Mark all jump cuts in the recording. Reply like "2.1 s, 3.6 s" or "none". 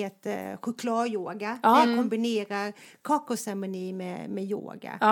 none